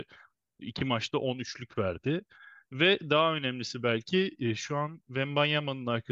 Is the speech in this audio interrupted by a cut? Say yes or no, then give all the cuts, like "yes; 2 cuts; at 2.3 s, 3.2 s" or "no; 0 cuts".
no; 0 cuts